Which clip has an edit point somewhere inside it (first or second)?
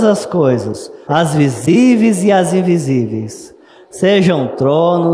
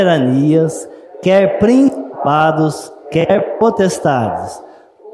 first